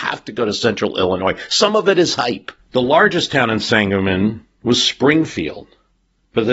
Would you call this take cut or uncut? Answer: cut